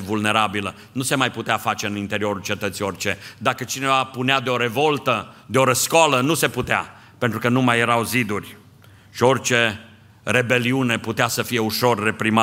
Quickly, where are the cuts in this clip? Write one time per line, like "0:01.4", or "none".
none